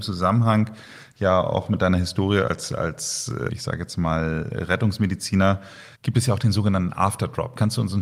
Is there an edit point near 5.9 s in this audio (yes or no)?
yes